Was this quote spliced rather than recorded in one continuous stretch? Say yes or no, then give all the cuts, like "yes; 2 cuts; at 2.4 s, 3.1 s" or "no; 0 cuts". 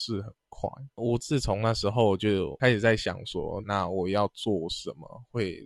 yes; 2 cuts; at 0.9 s, 3.6 s